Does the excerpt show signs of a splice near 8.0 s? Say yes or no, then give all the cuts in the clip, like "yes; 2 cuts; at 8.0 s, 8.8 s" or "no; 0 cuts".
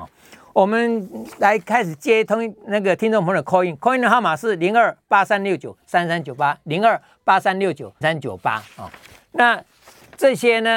yes; 1 cut; at 8.0 s